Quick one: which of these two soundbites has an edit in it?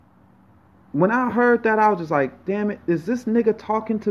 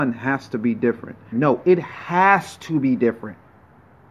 second; 1 cut; at 1.3 s

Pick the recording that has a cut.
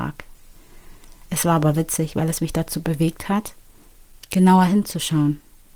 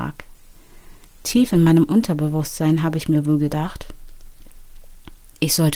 second; 1 cut; at 1.0 s

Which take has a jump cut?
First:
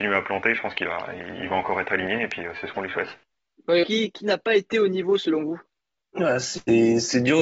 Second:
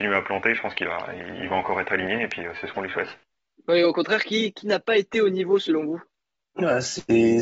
first; 1 cut; at 3.8 s

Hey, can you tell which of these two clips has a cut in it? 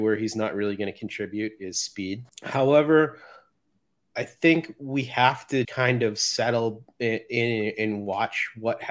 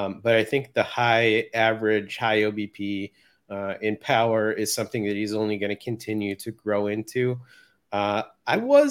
first; 2 cuts; at 2.3 s, 5.6 s

